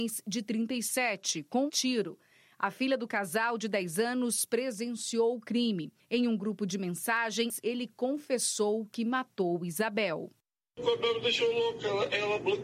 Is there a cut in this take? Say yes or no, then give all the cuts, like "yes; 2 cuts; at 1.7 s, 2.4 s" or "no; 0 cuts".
yes; 1 cut; at 1.7 s